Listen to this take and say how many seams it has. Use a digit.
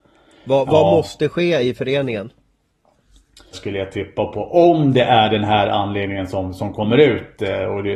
1